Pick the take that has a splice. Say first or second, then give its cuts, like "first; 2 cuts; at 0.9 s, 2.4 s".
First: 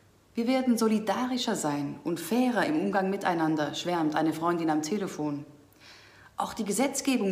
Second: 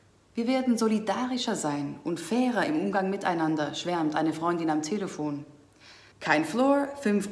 second; 1 cut; at 6.1 s